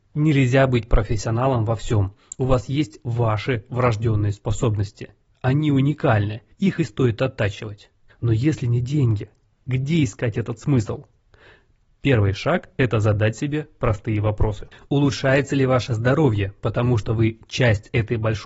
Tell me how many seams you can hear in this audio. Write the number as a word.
three